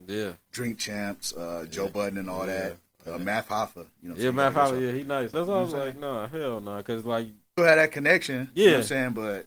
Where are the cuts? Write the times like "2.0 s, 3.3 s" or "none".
5.3 s, 7.6 s